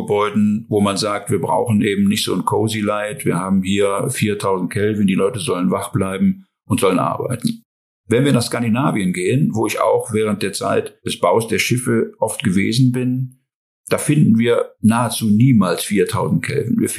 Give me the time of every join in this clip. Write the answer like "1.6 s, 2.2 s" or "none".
none